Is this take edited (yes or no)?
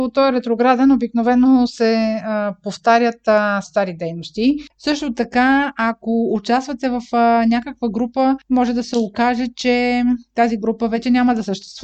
yes